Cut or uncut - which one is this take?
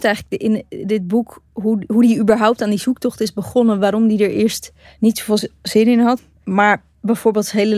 uncut